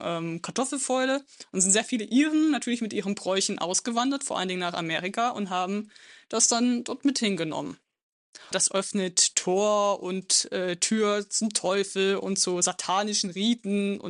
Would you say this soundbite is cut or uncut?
cut